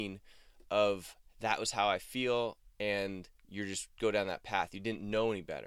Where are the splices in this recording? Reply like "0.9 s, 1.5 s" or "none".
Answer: 3.4 s

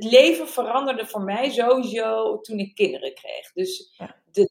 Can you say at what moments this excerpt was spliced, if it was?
none

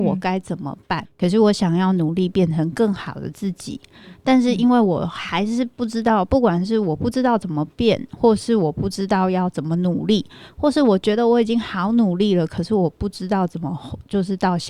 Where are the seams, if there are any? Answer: 1.0 s

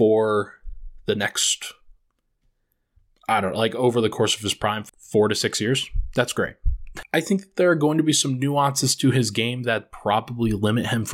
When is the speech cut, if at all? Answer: 4.9 s, 7.0 s

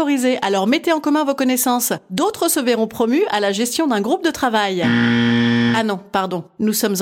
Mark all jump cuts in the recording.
none

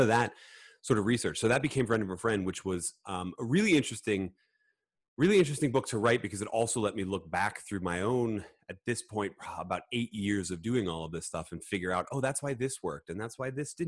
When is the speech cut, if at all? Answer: none

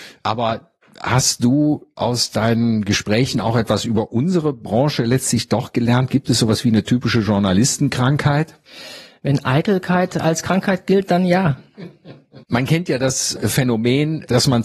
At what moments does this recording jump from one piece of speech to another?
12.4 s

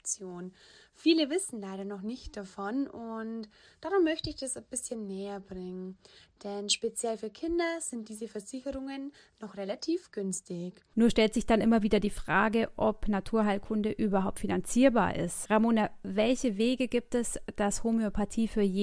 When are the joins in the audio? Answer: 10.9 s, 15.4 s

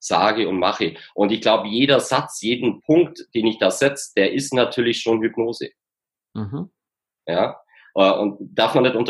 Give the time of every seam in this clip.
none

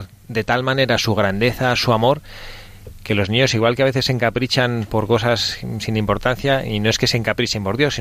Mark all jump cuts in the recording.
none

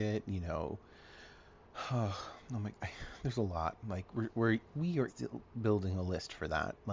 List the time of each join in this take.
5.1 s

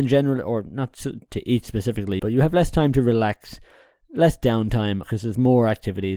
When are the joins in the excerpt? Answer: 2.2 s, 5.0 s

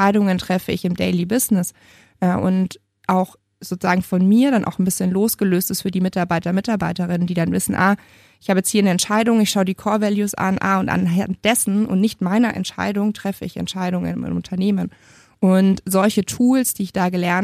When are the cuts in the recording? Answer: none

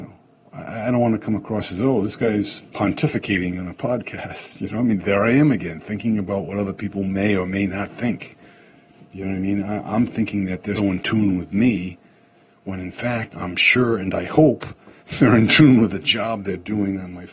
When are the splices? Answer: 10.8 s, 13.3 s

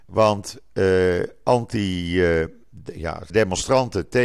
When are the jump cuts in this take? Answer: 3.3 s

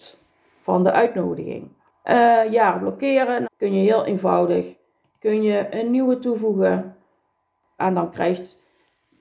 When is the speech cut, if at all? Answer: 3.4 s, 7.8 s

